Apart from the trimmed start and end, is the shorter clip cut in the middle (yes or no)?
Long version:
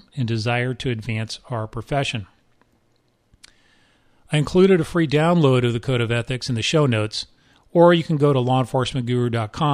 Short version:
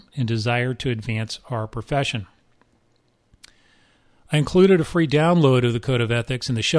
no